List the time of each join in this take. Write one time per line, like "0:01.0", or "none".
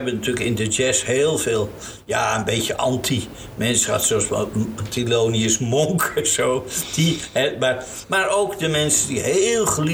none